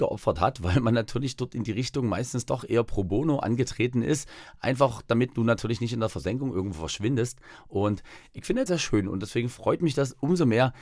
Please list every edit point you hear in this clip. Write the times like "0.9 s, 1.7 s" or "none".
8.7 s